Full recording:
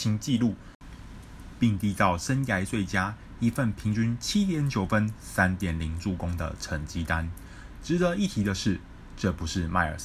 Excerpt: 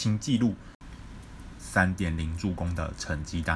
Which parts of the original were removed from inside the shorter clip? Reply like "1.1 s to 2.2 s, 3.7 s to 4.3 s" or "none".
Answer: 1.6 s to 5.2 s